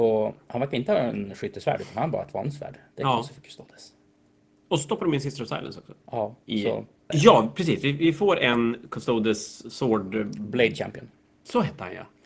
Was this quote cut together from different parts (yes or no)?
yes